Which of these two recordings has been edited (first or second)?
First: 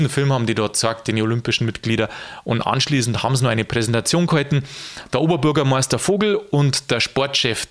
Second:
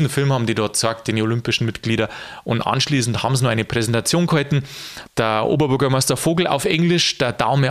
second